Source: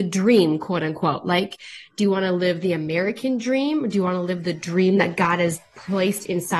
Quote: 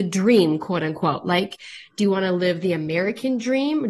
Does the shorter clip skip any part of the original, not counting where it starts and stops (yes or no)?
no